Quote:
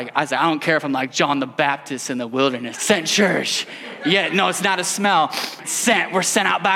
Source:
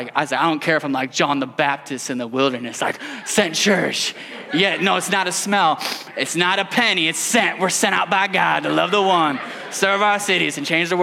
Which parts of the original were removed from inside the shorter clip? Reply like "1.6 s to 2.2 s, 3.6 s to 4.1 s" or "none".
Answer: 2.7 s to 3.2 s, 6.1 s to 7.1 s

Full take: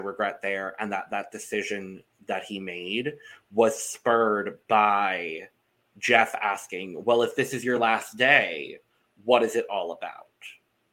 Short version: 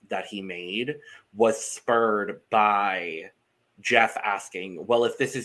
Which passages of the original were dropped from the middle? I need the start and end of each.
none

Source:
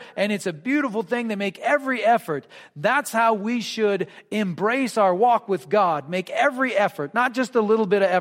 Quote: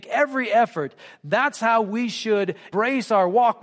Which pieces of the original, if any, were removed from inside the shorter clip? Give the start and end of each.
4.2 s to 4.6 s

